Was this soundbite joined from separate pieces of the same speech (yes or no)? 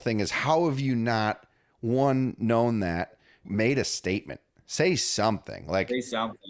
yes